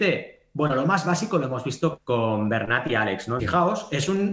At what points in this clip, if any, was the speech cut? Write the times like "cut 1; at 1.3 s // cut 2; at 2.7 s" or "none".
cut 1; at 2.0 s // cut 2; at 3.4 s